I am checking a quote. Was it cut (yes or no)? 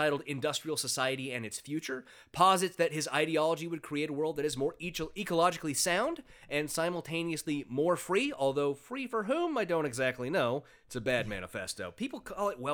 no